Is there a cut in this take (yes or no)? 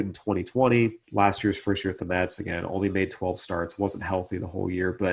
yes